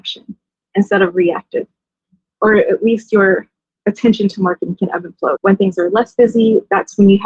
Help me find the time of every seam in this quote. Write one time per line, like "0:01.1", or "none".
0:02.2
0:05.3